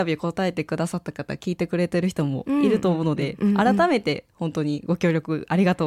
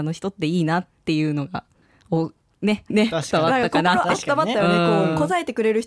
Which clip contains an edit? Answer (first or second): second